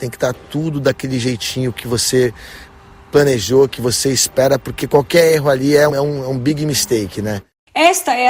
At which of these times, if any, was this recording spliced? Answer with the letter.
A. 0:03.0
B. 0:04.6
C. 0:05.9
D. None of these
C